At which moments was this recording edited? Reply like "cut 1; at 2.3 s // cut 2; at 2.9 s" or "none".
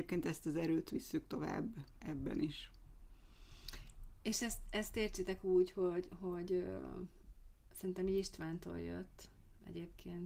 none